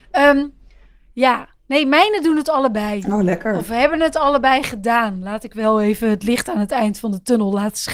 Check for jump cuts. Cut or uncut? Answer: uncut